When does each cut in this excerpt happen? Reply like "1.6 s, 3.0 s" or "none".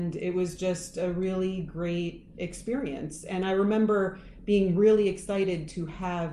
none